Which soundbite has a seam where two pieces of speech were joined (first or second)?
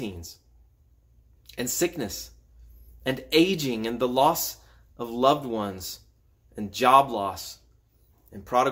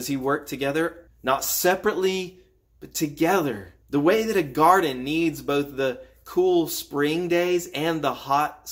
second